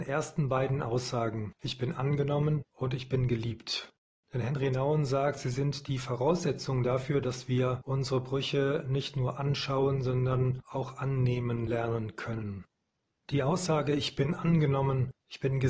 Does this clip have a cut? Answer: no; 0 cuts

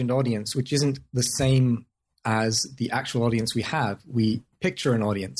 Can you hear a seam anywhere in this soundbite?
no; 0 cuts

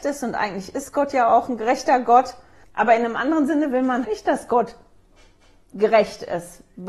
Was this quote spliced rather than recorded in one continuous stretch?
yes; 2 cuts; at 2.6 s, 4.0 s

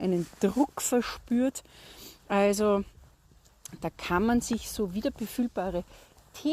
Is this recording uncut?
yes; 0 cuts

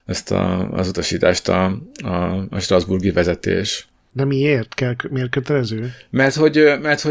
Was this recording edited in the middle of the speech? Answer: no; 0 cuts

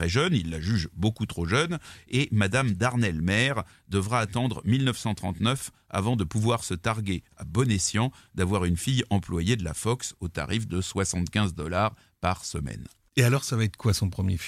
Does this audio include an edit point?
no; 0 cuts

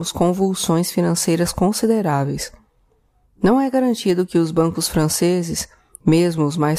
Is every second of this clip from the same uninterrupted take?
yes; 0 cuts

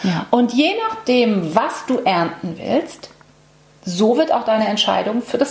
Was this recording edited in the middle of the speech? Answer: no; 0 cuts

